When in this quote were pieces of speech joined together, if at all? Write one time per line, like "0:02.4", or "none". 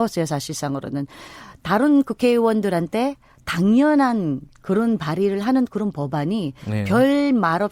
none